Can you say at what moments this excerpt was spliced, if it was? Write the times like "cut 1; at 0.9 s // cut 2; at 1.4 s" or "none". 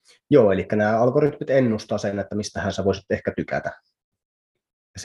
none